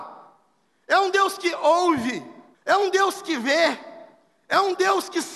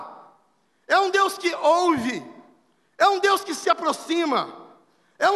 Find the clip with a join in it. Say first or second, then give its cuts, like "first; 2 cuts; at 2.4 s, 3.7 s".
first; 1 cut; at 2.5 s